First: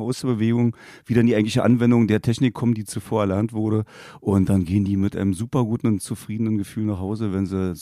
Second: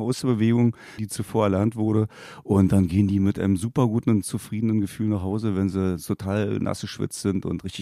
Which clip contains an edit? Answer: second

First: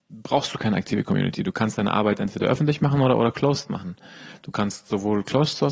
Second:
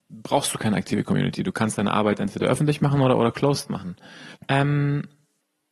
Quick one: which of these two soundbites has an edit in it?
second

